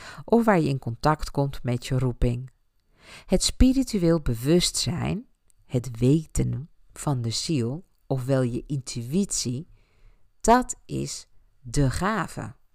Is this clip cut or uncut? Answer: uncut